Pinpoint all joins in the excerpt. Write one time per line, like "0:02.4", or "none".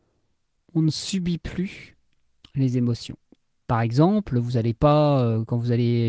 0:03.6